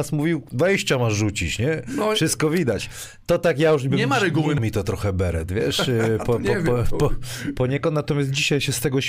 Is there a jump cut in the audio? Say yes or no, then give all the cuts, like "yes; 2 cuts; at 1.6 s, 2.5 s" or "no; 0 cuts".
yes; 1 cut; at 4.6 s